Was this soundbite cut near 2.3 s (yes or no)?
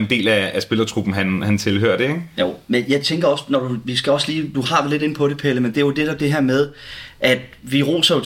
no